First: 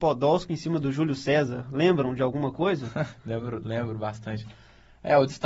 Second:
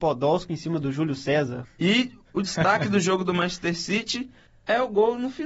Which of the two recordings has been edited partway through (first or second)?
second